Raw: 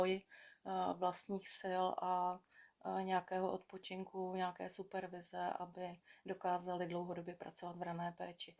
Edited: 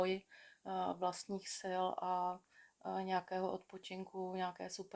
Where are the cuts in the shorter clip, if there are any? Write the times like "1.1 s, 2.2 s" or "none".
none

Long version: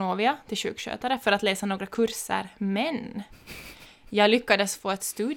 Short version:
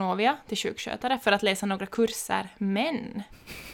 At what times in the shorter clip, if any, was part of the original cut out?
none

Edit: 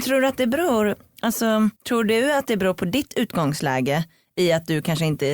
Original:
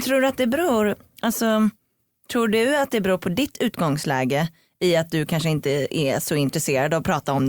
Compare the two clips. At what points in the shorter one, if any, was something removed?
1.8 s

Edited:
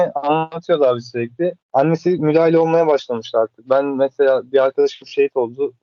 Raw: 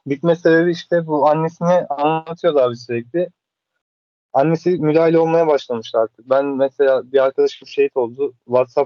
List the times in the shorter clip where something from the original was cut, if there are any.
1.6 s

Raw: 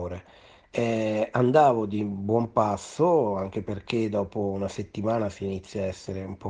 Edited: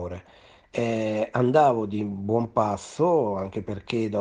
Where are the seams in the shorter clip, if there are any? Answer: none

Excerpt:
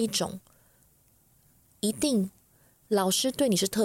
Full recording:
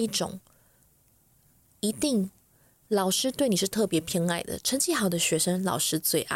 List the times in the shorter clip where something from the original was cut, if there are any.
none

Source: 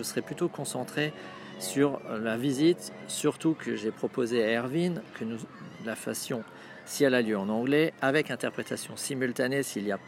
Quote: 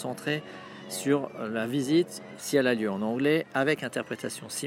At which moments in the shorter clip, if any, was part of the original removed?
2.4 s

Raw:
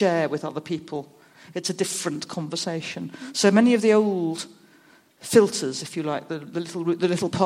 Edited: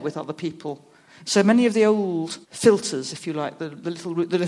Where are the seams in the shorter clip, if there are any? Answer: 1.2 s, 2.4 s

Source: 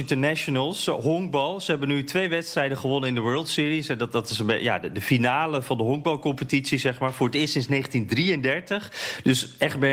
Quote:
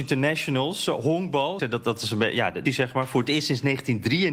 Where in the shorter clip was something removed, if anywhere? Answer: 1.6 s, 2.7 s

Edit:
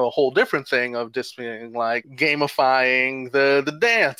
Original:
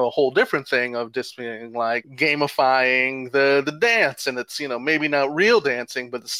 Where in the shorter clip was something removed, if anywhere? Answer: none

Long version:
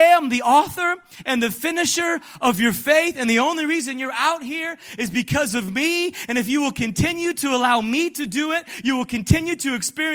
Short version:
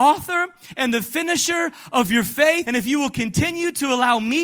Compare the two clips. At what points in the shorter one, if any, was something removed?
2.6 s

